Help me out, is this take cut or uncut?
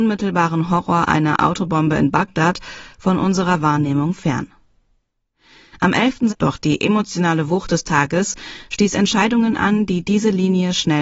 cut